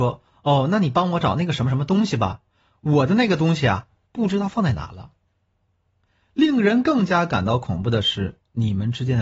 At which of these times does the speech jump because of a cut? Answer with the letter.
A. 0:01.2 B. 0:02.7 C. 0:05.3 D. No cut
A